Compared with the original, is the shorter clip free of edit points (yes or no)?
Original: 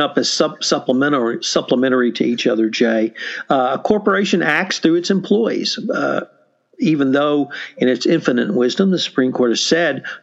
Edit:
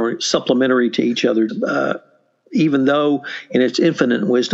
no